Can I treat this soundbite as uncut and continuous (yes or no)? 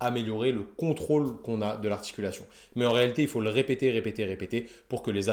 yes